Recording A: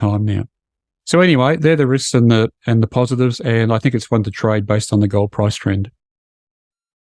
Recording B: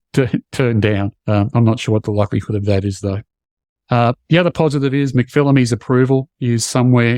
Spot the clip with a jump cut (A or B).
B